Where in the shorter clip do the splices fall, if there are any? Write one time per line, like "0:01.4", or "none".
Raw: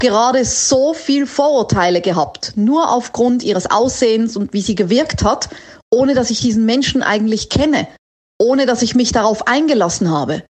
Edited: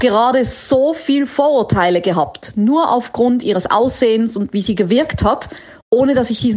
none